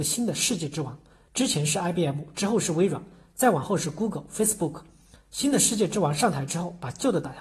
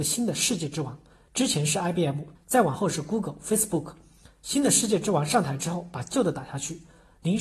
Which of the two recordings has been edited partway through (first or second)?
second